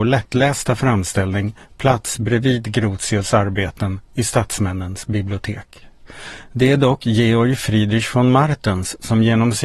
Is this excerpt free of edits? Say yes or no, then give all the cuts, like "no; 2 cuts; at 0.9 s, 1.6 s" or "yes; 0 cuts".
yes; 0 cuts